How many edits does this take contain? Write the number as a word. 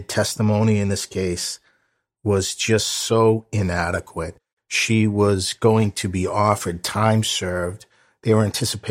zero